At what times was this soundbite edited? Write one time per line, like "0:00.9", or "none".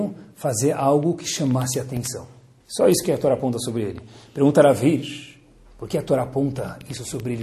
0:02.6